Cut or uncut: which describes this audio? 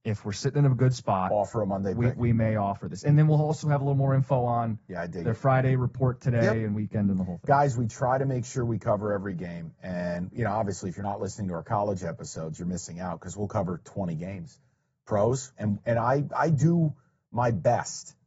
cut